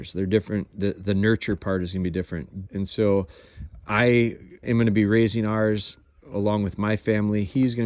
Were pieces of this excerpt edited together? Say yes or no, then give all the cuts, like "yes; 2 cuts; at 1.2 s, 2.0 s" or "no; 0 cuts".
yes; 2 cuts; at 2.7 s, 4.6 s